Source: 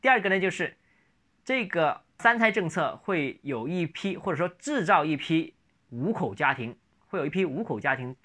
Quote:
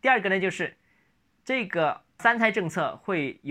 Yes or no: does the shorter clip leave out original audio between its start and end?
no